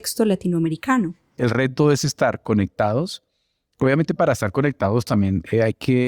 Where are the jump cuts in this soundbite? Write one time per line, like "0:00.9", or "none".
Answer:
none